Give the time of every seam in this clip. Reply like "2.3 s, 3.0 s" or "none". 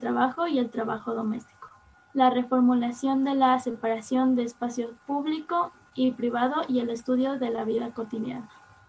1.9 s